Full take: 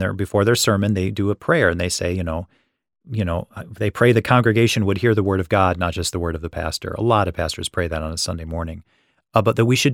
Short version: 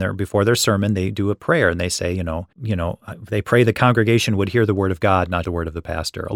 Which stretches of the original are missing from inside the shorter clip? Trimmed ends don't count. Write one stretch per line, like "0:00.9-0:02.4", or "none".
0:02.5-0:03.0
0:05.9-0:06.1